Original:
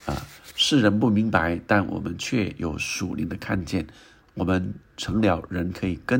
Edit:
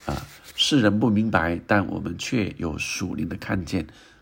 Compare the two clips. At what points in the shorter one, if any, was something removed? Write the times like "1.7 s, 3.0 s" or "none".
none